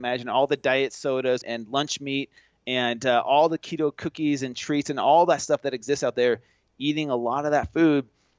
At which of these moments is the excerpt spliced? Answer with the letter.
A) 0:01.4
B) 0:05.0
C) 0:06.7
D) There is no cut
A